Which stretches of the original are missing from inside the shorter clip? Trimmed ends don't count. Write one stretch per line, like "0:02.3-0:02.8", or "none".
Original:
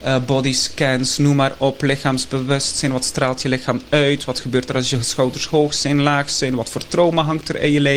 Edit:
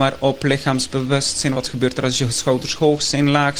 0:02.9-0:04.3